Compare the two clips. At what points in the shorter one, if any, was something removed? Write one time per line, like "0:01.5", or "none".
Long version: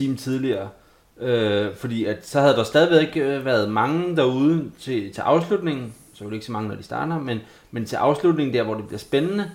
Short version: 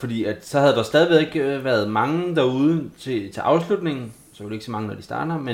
none

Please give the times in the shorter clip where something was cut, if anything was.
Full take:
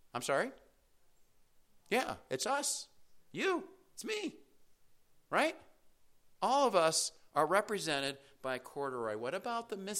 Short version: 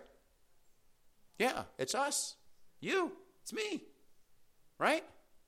none

